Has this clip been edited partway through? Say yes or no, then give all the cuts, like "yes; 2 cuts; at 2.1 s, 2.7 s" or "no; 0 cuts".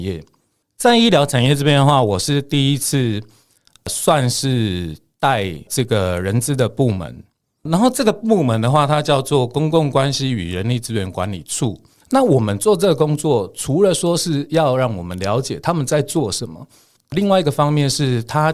yes; 1 cut; at 11.9 s